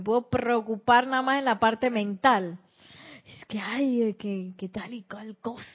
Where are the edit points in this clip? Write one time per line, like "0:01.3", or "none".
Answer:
none